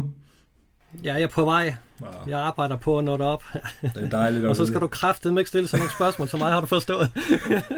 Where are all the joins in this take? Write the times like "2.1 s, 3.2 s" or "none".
none